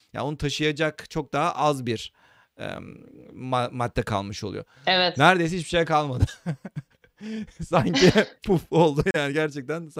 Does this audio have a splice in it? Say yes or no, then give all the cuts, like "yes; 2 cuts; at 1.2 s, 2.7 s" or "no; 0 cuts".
no; 0 cuts